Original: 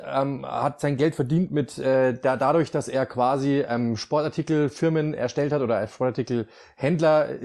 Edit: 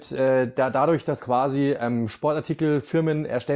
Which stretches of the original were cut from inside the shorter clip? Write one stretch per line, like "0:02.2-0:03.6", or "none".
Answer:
0:02.9-0:03.1